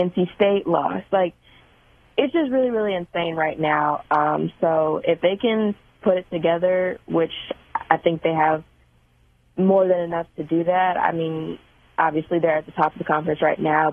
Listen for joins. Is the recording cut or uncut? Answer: uncut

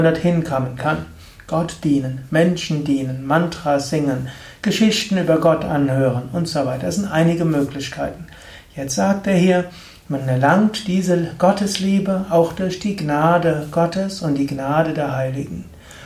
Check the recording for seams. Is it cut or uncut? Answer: uncut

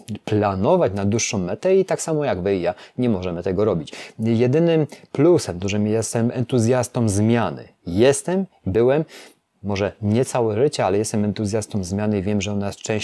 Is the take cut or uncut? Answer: uncut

